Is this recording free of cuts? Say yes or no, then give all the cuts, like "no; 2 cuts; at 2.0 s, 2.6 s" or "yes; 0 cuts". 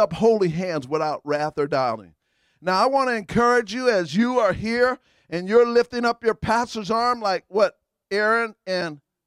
yes; 0 cuts